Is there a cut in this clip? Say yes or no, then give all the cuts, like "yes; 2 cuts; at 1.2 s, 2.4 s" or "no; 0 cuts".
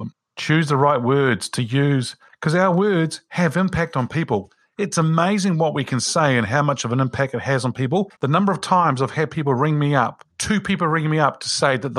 yes; 2 cuts; at 8.2 s, 10.3 s